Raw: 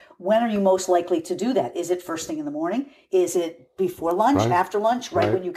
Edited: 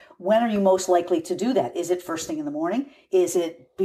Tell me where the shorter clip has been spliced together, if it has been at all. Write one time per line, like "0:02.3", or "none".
none